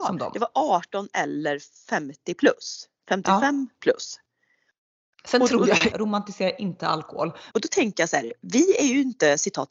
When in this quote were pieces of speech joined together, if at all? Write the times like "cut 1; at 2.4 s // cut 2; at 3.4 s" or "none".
cut 1; at 5.9 s // cut 2; at 7.5 s